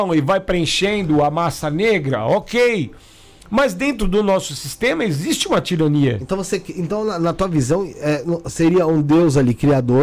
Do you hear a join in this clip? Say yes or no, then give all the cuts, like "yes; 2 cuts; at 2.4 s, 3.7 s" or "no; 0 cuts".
no; 0 cuts